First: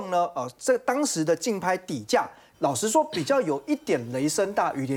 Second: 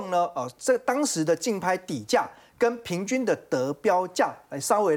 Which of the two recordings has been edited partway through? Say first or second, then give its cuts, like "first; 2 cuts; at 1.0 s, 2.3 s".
first; 1 cut; at 2.5 s